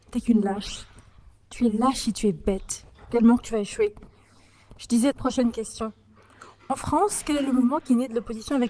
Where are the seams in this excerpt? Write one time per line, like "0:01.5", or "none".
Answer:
0:05.1